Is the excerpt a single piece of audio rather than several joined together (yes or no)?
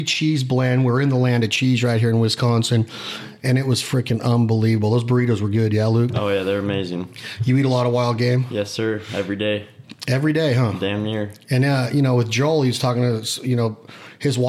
yes